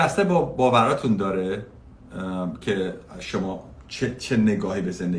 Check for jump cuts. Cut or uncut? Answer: uncut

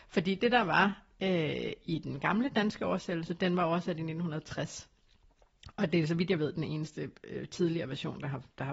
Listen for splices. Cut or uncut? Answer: uncut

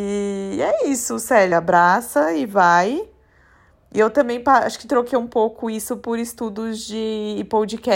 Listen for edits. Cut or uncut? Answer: uncut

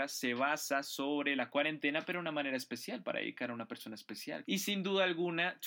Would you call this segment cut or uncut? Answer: cut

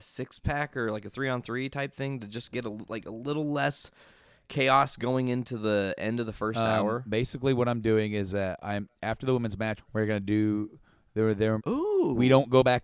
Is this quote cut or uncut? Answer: cut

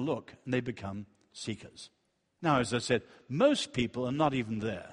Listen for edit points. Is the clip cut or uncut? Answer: uncut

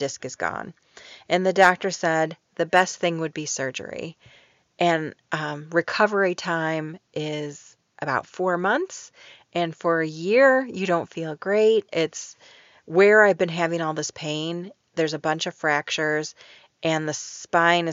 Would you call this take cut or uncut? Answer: cut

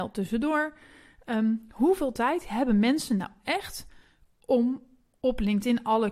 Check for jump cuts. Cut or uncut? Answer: uncut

